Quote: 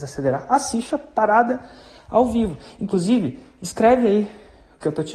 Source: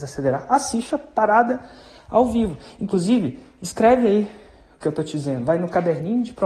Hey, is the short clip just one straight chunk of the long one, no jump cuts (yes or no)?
yes